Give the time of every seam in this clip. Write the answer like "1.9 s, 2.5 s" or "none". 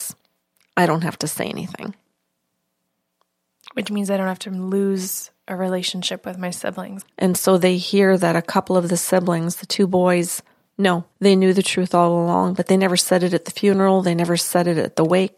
7.0 s, 11.1 s

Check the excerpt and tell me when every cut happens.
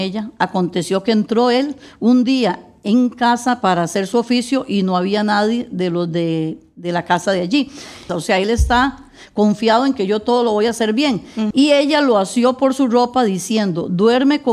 8.1 s, 11.5 s

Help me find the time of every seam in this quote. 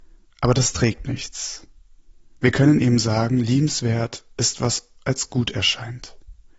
none

